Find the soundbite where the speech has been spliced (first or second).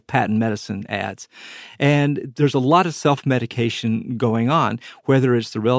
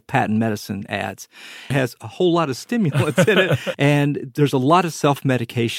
second